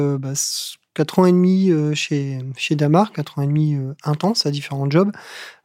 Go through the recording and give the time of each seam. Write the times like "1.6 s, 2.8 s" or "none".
none